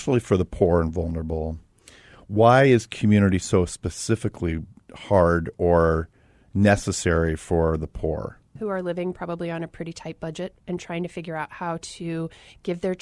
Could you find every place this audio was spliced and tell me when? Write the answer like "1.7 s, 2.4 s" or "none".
8.6 s